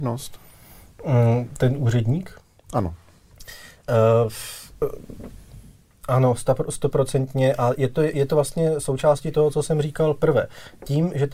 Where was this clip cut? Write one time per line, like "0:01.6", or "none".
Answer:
none